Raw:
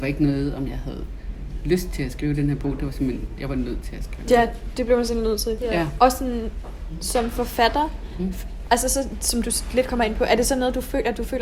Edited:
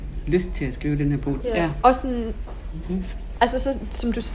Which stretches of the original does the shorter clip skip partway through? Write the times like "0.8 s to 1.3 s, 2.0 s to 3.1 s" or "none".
2.8 s to 5.6 s, 7.0 s to 8.1 s